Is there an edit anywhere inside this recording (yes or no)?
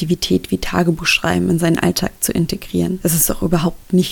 no